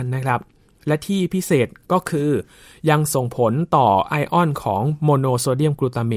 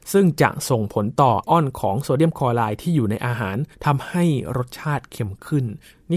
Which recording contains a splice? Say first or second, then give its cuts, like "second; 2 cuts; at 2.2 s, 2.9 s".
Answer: second; 2 cuts; at 1.4 s, 3.7 s